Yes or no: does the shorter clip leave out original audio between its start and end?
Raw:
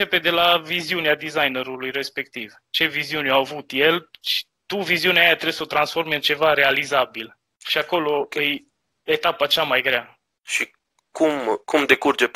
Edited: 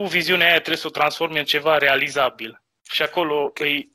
no